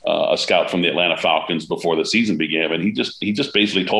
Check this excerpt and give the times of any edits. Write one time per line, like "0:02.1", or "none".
none